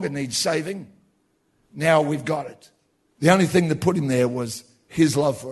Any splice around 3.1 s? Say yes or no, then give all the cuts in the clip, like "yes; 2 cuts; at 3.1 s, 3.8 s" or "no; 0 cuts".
yes; 1 cut; at 3.1 s